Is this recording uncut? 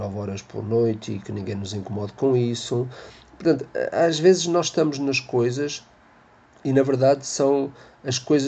yes; 0 cuts

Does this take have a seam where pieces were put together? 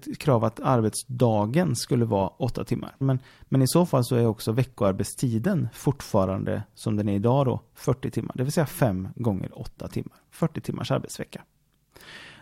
yes; 1 cut; at 3.0 s

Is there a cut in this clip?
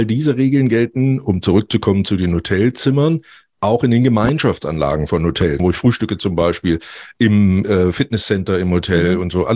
yes; 1 cut; at 5.6 s

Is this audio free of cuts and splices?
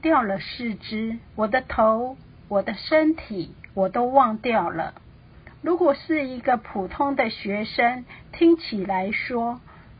no; 2 cuts; at 1.3 s, 3.7 s

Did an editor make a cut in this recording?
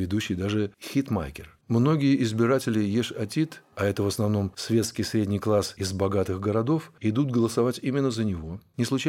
yes; 1 cut; at 1.6 s

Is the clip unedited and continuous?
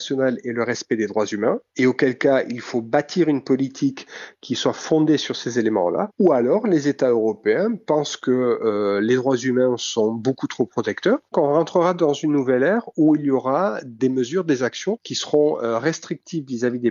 no; 1 cut; at 11.3 s

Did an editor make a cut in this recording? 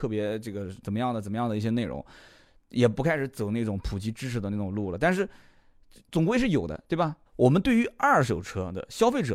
yes; 1 cut; at 7.3 s

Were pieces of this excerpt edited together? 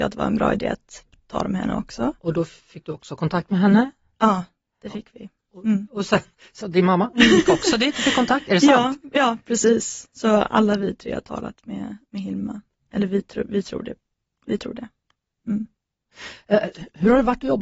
yes; 1 cut; at 6.6 s

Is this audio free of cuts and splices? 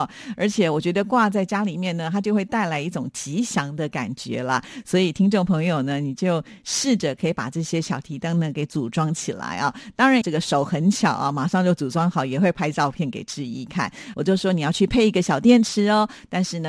no; 2 cuts; at 10.2 s, 14.1 s

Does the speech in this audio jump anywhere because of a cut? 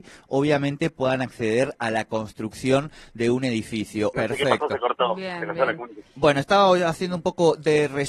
yes; 1 cut; at 4.1 s

